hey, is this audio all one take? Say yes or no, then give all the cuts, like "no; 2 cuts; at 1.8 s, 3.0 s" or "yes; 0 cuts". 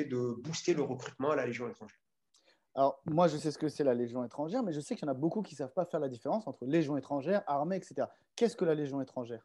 yes; 0 cuts